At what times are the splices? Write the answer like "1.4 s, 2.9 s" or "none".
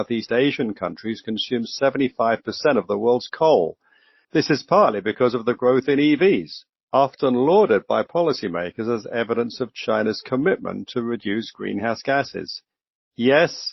4.2 s